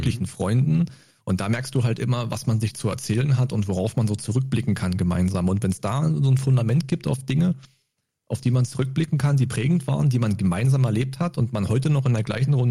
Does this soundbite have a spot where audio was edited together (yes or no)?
no